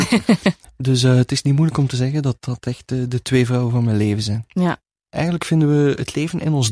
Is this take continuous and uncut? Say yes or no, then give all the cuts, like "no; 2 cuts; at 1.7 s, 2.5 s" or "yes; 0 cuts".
no; 1 cut; at 5.1 s